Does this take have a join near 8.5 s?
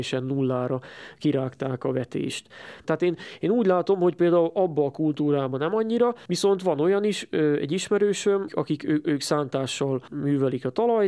yes; 2 cuts; at 2.8 s, 8.5 s

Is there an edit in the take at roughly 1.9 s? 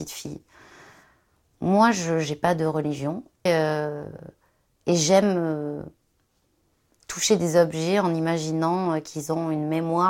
no; 1 cut; at 3.5 s

